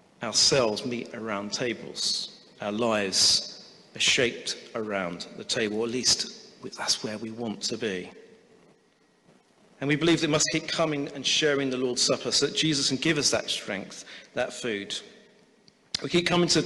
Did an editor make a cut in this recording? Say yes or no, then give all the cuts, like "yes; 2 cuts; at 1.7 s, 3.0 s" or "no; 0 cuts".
no; 0 cuts